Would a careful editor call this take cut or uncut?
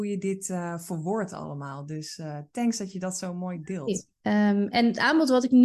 cut